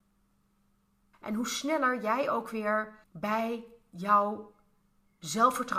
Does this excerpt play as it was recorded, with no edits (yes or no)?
no